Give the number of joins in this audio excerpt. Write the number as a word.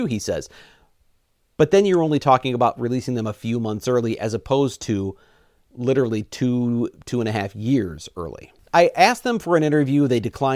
one